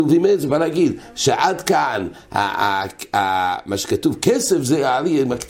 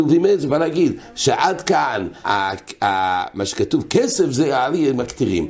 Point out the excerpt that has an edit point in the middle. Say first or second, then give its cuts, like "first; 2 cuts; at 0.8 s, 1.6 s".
second; 1 cut; at 2.2 s